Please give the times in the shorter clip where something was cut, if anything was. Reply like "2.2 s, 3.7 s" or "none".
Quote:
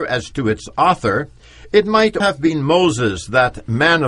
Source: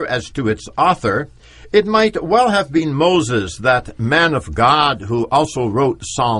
2.2 s